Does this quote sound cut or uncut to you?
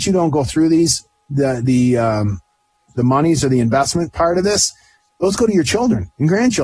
uncut